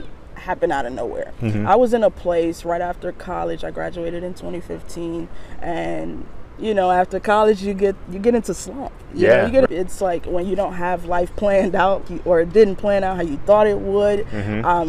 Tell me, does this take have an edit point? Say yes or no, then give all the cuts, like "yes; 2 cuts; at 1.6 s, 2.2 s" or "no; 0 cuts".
yes; 2 cuts; at 9.7 s, 12.0 s